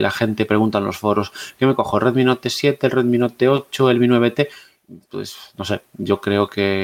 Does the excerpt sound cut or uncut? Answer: uncut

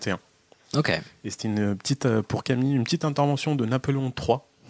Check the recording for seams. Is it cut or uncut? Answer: uncut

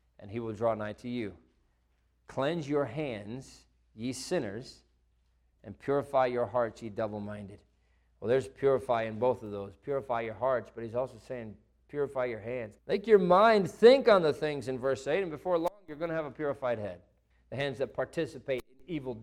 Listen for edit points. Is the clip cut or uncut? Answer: cut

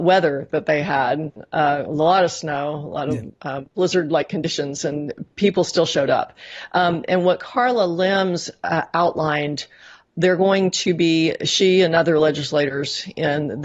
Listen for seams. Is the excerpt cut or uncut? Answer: uncut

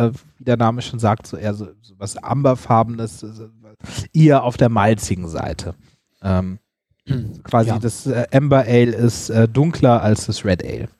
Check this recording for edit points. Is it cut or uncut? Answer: uncut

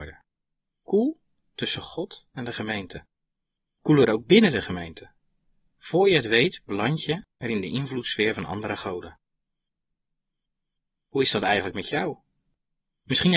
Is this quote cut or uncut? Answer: cut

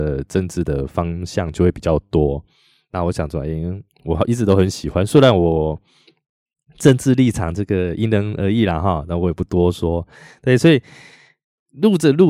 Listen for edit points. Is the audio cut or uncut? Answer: uncut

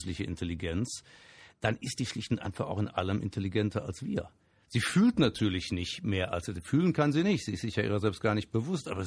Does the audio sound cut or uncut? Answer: uncut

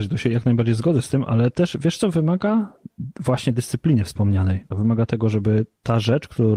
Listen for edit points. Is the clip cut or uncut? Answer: cut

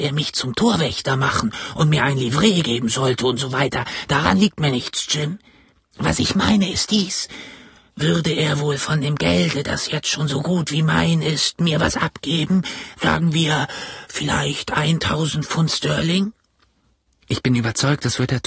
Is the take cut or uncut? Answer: uncut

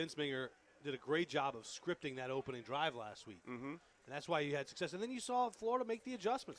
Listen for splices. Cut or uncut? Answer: uncut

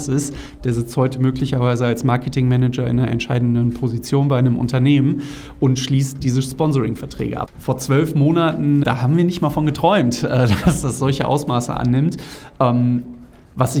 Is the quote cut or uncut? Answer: cut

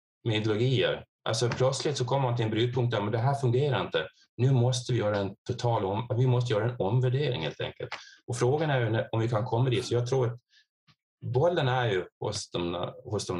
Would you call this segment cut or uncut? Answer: uncut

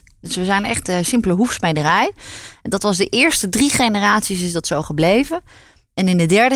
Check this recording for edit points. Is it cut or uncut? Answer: uncut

